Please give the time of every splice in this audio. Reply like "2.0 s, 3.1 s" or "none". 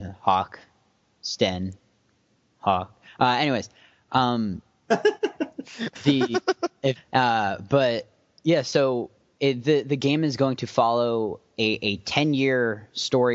7.0 s